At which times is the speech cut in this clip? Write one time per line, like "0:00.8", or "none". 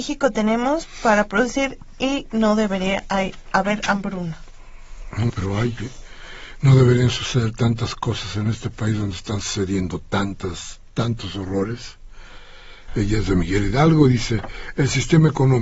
0:05.3
0:12.9